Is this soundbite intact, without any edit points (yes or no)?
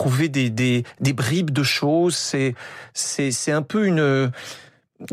yes